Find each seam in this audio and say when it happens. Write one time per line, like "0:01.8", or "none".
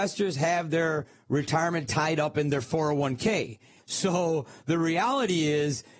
0:03.8